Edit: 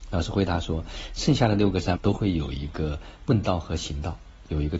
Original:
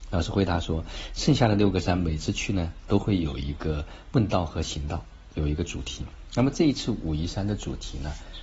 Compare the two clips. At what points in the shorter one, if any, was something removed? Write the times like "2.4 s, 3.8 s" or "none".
1.9 s